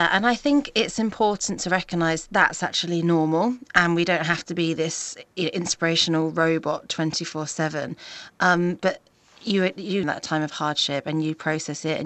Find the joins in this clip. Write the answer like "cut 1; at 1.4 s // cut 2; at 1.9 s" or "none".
cut 1; at 10.0 s